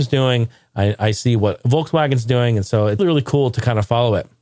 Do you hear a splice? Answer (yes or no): yes